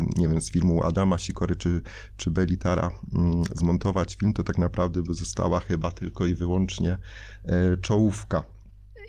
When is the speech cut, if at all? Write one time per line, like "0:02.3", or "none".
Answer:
none